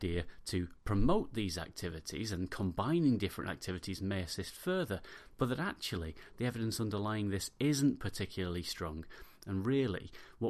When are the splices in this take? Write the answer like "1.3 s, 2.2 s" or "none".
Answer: none